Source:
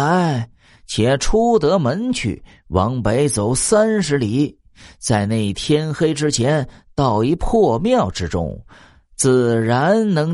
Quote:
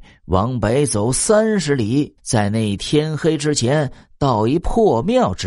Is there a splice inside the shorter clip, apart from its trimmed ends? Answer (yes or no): yes